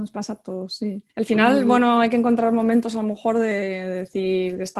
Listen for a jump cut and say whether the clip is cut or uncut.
cut